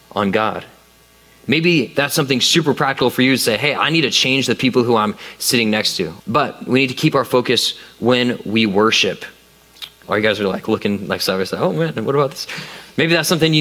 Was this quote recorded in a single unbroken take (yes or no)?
no